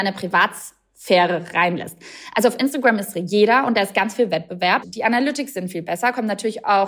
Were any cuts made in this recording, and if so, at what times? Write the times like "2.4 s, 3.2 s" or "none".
4.8 s